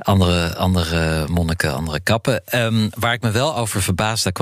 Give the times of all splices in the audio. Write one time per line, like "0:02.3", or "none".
none